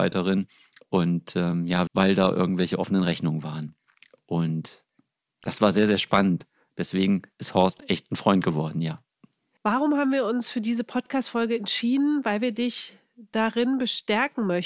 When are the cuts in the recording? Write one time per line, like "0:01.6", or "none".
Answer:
0:01.9
0:09.6